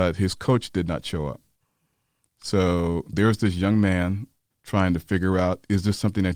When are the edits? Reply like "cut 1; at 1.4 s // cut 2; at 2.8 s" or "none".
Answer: cut 1; at 3.1 s // cut 2; at 4.5 s

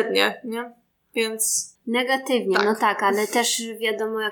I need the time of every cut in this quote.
cut 1; at 1.8 s

